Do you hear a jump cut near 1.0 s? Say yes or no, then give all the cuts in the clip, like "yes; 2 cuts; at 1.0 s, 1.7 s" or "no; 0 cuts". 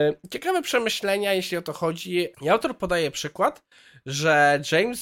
no; 1 cut; at 2.3 s